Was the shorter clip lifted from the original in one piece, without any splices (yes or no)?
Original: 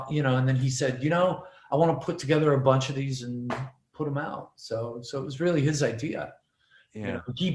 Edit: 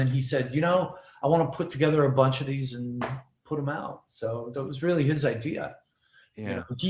no